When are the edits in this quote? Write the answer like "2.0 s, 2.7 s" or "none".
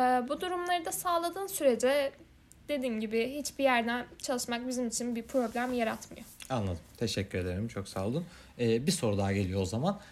none